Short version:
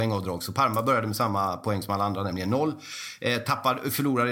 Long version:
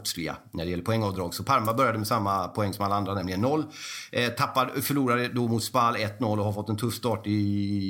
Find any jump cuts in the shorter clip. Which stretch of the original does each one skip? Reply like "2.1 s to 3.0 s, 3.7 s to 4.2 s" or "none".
none